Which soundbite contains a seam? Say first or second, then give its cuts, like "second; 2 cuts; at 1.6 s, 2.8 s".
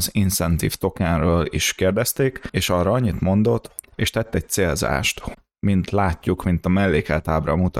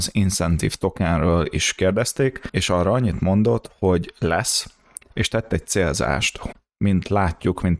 first; 1 cut; at 3.8 s